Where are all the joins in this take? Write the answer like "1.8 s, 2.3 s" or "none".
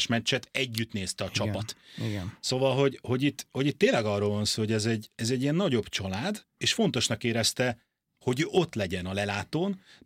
6.6 s, 8.2 s